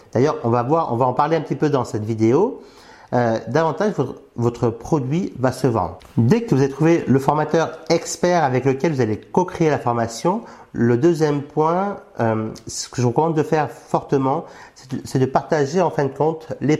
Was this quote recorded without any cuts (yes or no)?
yes